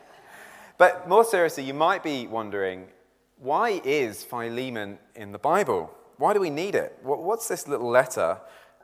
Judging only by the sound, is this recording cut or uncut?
uncut